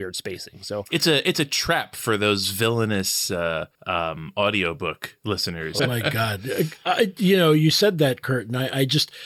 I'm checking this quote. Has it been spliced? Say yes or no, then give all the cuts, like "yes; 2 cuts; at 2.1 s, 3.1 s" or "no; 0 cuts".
yes; 2 cuts; at 3.7 s, 5.8 s